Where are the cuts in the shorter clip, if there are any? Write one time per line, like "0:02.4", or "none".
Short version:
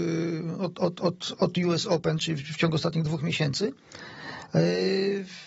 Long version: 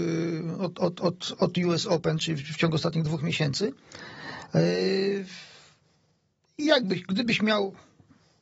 none